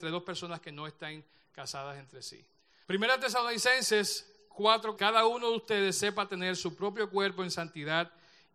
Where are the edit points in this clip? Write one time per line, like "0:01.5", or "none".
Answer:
0:02.8
0:05.0